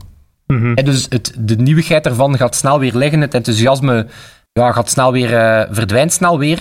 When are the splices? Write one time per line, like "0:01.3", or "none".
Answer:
0:01.1